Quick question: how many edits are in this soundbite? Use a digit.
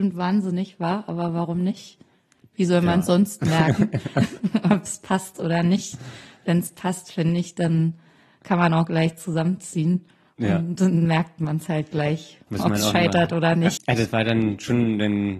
2